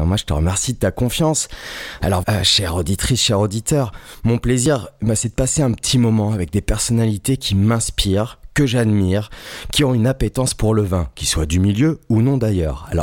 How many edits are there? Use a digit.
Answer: 1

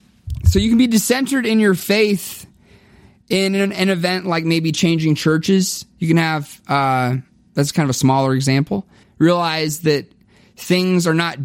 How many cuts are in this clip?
1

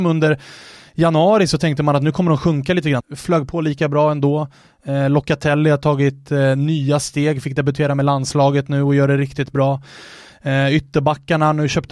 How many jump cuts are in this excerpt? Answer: 1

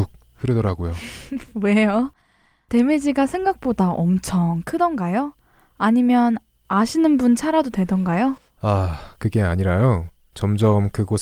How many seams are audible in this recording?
0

